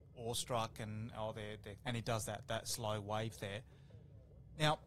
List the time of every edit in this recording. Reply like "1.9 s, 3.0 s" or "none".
1.8 s